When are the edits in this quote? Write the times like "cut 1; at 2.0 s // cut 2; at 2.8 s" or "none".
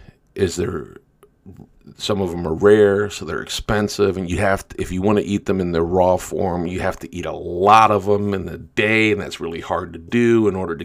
none